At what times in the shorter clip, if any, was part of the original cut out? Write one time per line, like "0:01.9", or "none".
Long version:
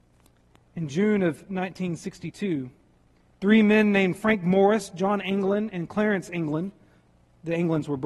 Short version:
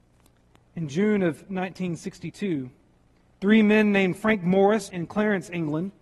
0:04.9